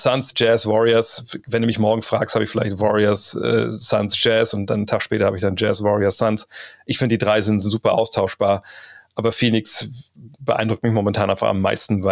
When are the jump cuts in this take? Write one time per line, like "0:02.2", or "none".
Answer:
none